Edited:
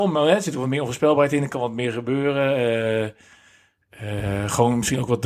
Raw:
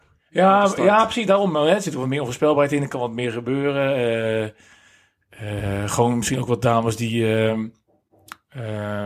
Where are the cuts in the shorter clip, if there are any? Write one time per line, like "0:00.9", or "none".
none